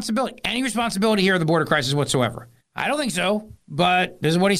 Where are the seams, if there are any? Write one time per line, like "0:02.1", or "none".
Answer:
0:02.6